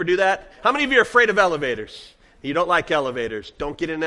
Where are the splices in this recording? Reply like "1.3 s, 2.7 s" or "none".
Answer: none

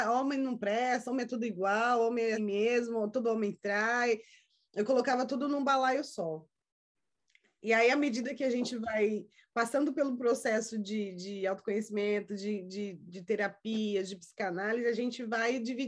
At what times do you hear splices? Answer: 2.4 s

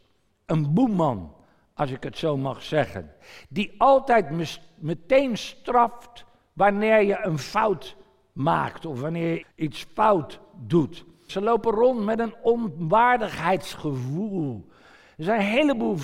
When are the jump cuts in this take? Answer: 9.4 s, 11.3 s

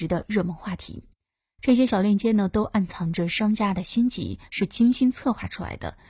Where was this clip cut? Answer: none

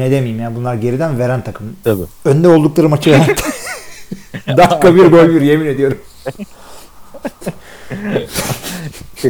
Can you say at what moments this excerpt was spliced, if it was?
1.8 s

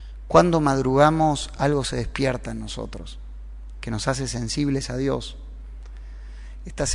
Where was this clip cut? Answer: none

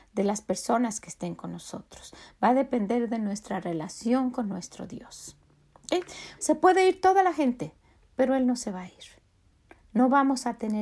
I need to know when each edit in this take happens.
6.4 s

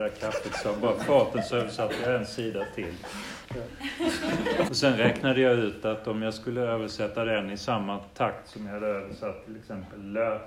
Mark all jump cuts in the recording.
3.4 s, 4.7 s

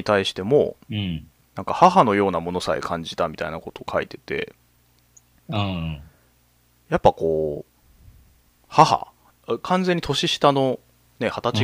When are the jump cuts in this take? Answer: none

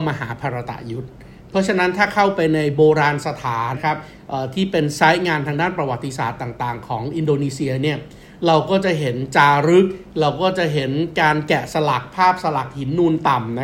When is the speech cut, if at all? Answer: 3.7 s

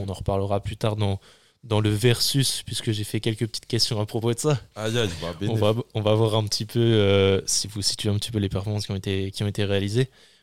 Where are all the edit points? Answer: none

